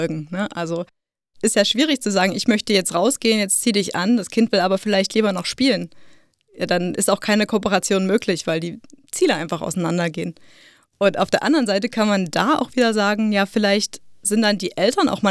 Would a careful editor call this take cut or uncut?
uncut